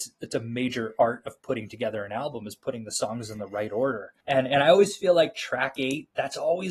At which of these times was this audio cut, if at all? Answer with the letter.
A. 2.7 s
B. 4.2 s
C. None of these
B